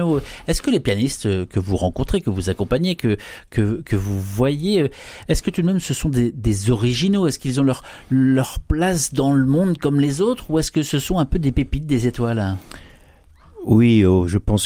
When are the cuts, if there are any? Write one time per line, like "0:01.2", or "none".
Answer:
none